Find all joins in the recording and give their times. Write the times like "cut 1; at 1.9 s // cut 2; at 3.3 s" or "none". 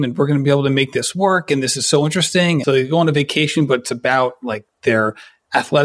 cut 1; at 2.6 s